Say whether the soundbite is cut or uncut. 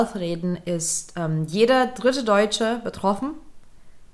uncut